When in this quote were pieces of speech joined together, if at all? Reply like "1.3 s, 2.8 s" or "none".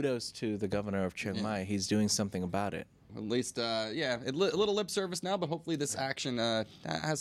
3.1 s